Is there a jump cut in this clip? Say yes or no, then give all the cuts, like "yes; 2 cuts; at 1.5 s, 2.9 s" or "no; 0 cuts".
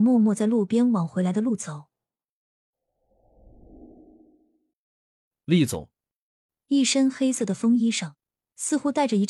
yes; 1 cut; at 6.5 s